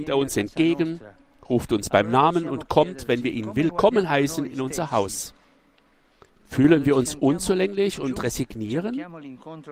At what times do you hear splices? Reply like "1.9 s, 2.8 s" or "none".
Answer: 6.3 s